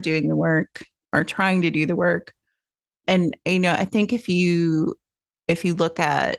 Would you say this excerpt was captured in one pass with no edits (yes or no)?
no